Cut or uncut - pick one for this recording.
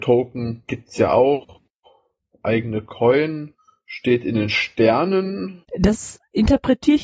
cut